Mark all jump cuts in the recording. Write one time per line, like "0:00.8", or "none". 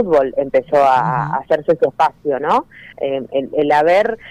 0:02.9